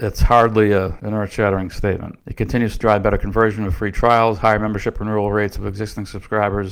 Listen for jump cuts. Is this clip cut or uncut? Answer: cut